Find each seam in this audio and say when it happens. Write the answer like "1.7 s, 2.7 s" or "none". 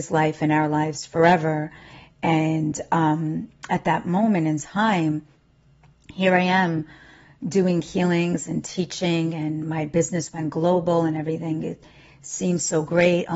none